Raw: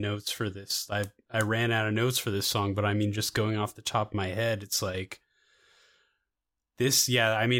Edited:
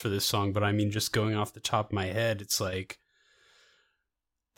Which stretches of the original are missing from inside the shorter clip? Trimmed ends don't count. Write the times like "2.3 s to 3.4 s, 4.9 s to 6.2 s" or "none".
none